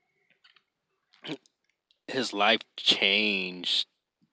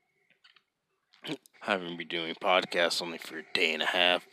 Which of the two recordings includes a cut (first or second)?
second